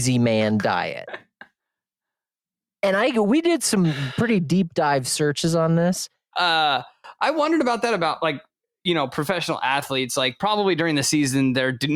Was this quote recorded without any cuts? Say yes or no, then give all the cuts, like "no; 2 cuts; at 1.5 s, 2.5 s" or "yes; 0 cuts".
no; 1 cut; at 6.3 s